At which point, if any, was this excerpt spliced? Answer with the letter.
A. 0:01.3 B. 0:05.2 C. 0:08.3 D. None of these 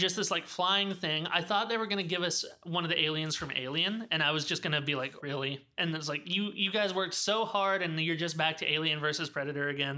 B